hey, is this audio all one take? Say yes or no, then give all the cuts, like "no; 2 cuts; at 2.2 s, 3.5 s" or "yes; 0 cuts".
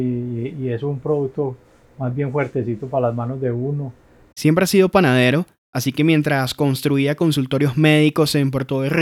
yes; 0 cuts